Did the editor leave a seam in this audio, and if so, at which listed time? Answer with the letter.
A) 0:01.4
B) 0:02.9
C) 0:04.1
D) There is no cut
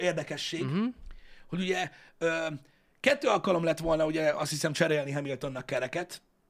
D